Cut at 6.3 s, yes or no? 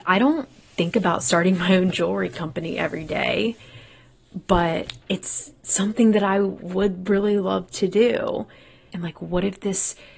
no